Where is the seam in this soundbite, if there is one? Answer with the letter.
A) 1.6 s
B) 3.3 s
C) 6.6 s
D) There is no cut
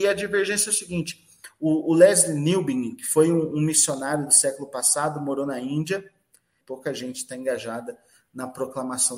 C